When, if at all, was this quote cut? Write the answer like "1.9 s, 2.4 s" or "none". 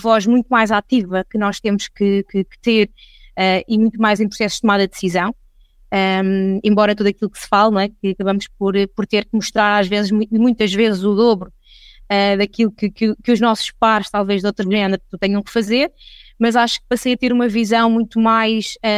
none